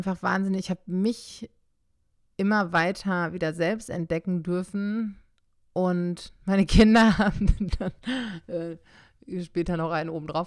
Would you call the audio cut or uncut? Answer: uncut